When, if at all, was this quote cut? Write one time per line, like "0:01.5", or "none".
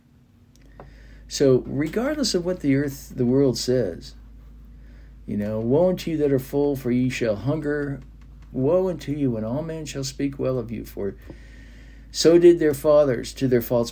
0:08.5